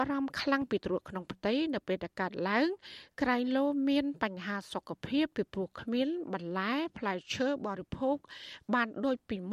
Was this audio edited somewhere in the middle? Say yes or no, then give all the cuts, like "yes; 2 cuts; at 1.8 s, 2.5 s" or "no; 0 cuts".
no; 0 cuts